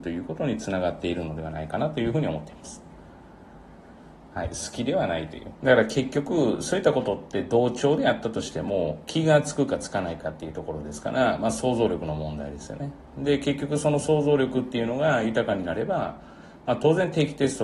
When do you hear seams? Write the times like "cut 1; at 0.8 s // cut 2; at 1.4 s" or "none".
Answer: cut 1; at 4.3 s // cut 2; at 5.5 s